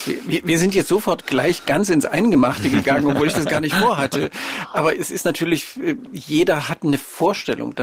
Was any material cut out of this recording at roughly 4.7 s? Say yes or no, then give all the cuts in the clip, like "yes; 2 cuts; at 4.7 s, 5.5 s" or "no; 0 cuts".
no; 0 cuts